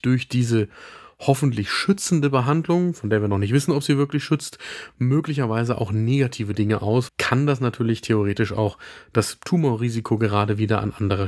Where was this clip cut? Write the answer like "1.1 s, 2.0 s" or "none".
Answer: 7.1 s